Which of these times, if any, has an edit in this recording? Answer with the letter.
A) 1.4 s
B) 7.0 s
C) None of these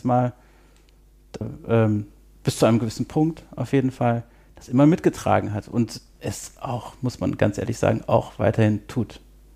A